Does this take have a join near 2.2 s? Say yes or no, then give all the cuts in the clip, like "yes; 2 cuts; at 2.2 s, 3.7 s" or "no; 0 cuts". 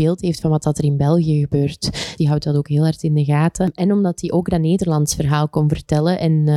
yes; 1 cut; at 2.2 s